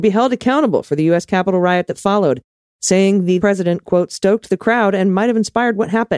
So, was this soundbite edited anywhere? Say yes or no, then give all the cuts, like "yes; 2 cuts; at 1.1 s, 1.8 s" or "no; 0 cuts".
yes; 1 cut; at 3.4 s